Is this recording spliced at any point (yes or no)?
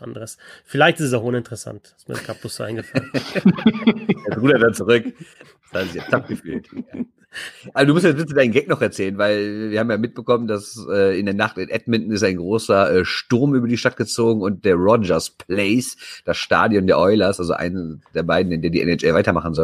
no